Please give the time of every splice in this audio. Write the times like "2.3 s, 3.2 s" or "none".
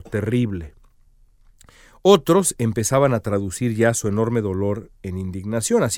none